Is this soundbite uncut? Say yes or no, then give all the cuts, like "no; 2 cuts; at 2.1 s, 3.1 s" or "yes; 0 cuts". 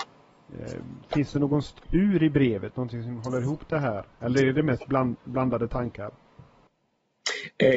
yes; 0 cuts